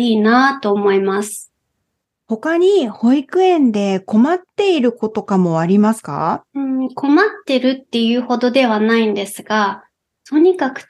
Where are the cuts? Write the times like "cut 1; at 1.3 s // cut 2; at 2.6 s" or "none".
cut 1; at 2.0 s // cut 2; at 5.1 s // cut 3; at 6.5 s